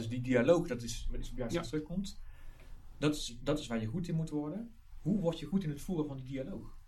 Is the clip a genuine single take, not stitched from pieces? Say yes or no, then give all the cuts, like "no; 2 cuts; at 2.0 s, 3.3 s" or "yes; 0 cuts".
yes; 0 cuts